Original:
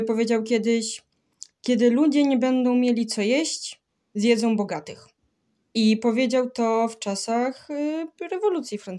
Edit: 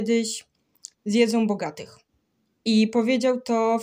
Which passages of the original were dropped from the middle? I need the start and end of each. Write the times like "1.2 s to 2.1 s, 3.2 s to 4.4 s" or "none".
1.5 s to 4.1 s